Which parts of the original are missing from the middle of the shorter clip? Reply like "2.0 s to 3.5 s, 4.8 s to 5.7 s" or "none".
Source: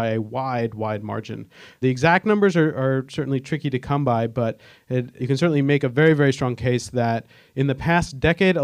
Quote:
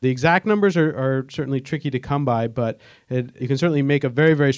none